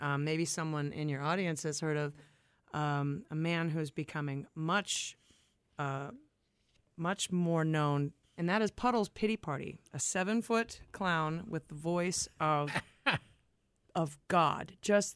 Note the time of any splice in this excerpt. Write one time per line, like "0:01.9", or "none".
0:08.2

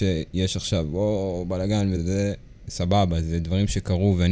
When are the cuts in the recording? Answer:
0:01.9

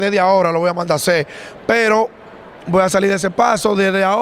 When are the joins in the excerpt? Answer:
0:01.6

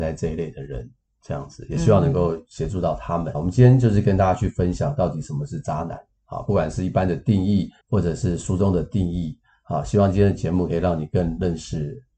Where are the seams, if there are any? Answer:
0:03.3
0:07.8

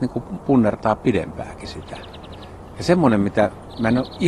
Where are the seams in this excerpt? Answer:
none

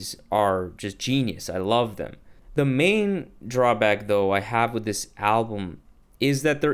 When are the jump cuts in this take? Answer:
0:02.4

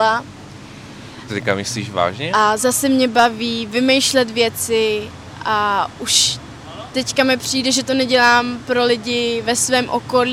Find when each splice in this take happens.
0:01.3
0:02.3

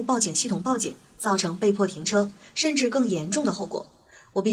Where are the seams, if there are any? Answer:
none

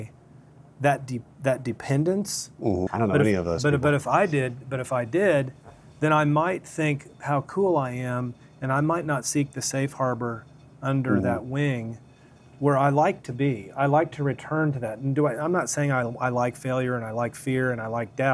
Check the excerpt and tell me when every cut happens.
0:02.9

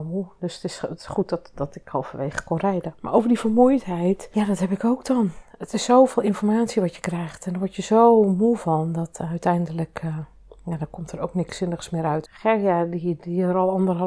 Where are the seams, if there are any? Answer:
0:12.3

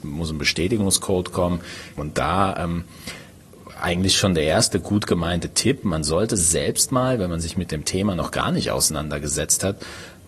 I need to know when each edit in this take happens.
0:02.0

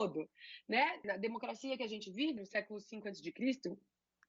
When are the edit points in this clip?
0:01.0
0:02.4

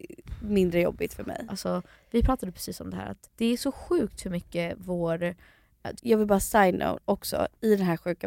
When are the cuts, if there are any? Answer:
0:03.2
0:06.0

